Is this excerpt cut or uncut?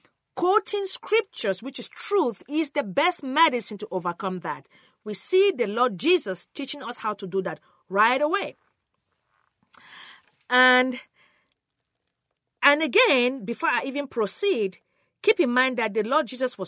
uncut